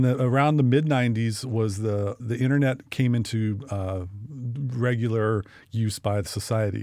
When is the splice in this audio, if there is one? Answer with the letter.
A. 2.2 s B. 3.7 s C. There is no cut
A